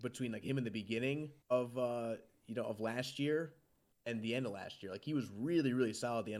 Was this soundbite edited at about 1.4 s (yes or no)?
yes